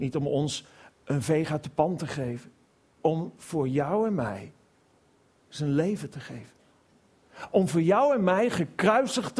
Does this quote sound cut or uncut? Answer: cut